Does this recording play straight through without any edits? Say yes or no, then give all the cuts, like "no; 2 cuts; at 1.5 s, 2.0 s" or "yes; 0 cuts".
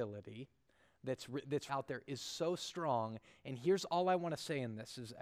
no; 1 cut; at 1.7 s